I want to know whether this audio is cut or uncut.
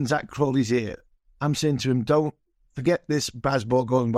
uncut